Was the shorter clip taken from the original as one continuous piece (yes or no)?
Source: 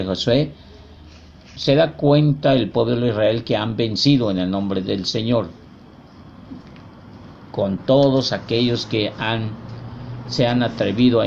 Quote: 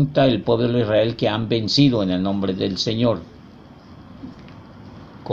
yes